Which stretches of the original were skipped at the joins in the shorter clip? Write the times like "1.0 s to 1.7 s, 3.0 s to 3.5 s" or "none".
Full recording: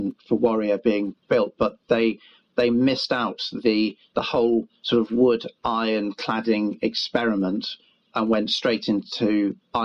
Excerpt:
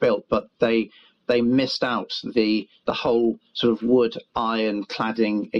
none